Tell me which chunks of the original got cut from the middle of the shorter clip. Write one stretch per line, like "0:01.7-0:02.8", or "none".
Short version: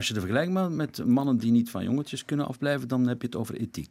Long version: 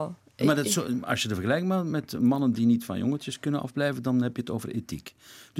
none